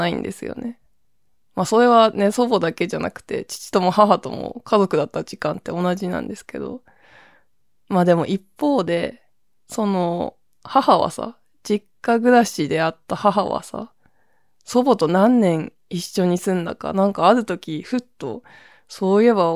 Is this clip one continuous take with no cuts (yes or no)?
yes